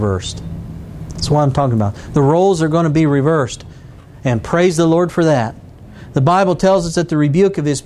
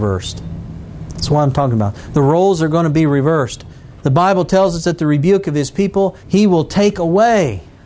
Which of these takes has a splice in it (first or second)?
second